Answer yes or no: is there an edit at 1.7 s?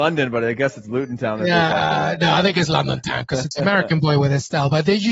no